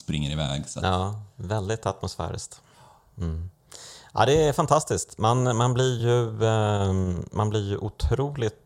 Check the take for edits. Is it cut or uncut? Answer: uncut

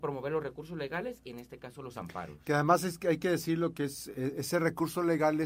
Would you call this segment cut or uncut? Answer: uncut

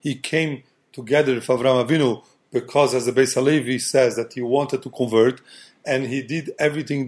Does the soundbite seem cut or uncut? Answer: uncut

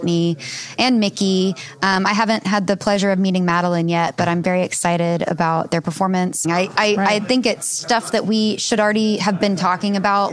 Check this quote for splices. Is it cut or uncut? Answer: cut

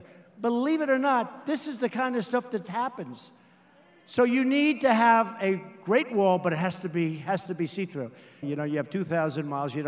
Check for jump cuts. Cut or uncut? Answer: cut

